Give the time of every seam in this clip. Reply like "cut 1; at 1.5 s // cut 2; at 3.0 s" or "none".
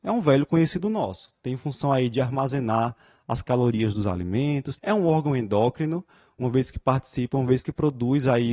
cut 1; at 4.8 s